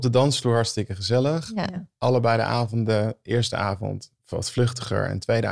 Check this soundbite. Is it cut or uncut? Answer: cut